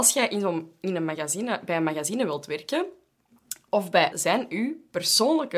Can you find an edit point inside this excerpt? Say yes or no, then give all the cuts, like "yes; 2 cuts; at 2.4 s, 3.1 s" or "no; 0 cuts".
yes; 1 cut; at 4.1 s